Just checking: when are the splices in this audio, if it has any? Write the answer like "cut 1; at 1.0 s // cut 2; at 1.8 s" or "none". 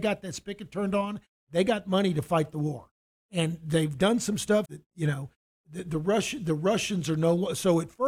cut 1; at 4.6 s